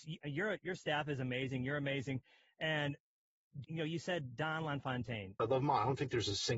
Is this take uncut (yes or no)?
no